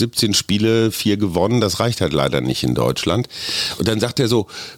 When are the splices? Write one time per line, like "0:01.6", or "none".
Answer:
none